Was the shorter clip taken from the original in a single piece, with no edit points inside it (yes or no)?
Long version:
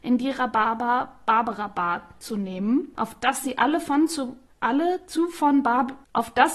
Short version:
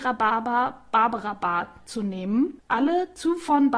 no